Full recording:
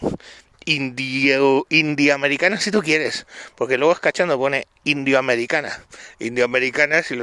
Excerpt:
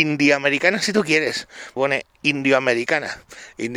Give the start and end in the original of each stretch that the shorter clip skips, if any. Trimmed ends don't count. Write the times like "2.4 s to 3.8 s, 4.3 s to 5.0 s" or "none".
3.5 s to 4.4 s